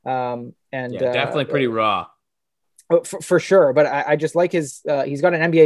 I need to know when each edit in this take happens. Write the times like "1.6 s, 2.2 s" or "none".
none